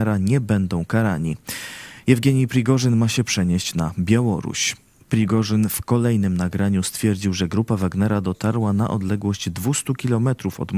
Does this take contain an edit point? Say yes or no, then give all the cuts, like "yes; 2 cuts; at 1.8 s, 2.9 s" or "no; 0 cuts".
no; 0 cuts